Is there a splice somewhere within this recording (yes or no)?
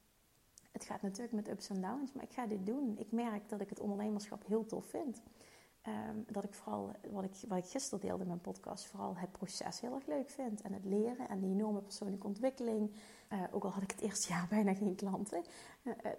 yes